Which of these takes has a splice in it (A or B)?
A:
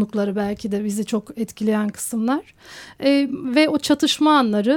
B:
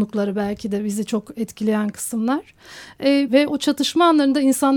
B